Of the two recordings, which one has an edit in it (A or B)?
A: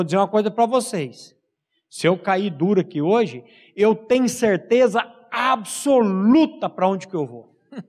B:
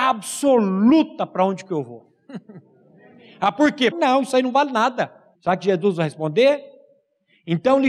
B